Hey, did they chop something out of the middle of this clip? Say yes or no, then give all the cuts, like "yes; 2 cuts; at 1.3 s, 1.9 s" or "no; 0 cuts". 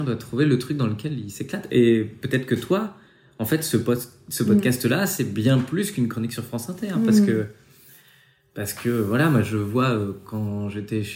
no; 0 cuts